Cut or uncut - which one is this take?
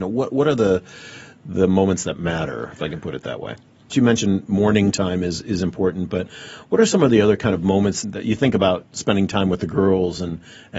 cut